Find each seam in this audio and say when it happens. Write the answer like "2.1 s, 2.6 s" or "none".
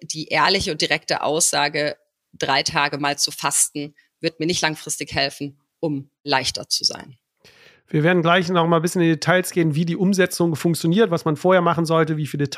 none